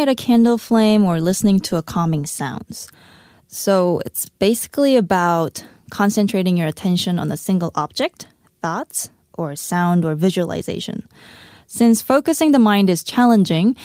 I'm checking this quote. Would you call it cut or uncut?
uncut